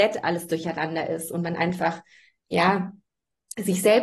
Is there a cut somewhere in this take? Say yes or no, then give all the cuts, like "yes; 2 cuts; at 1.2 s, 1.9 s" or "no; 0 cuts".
no; 0 cuts